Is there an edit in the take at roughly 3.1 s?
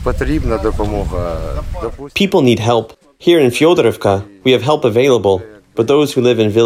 no; 0 cuts

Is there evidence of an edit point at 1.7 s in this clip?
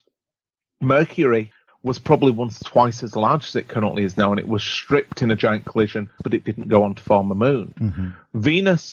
yes; 2 cuts; at 1.7 s, 6.2 s

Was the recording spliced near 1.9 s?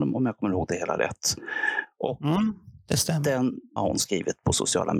no; 1 cut; at 3.8 s

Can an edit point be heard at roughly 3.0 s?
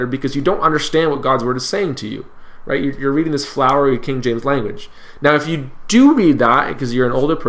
yes; 1 cut; at 3.0 s

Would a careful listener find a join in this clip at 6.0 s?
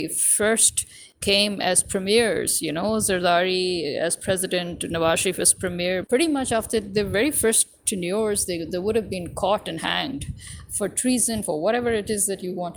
yes; 2 cuts; at 6.0 s, 11.4 s

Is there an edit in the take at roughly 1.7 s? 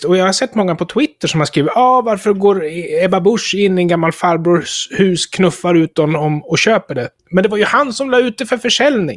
no; 1 cut; at 7.2 s

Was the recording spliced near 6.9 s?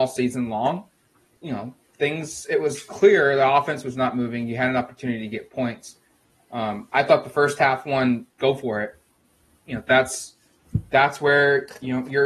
no; 1 cut; at 1.4 s

